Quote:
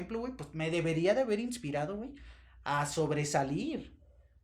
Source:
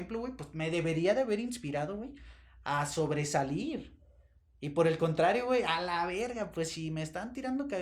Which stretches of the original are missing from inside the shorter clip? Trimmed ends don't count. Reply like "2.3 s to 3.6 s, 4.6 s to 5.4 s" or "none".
none